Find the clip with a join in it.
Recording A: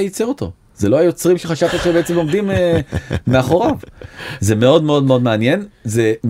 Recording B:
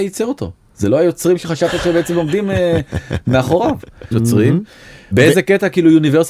B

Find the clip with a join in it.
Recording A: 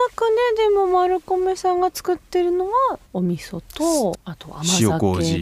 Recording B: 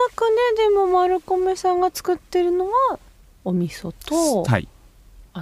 A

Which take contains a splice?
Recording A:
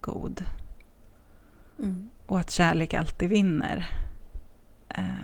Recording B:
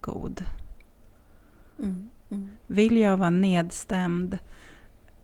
B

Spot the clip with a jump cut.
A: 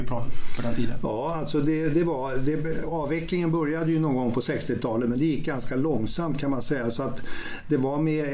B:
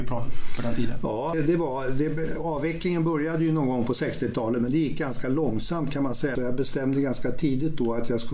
B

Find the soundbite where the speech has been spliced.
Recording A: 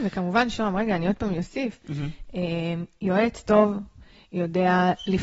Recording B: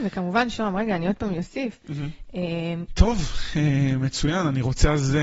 B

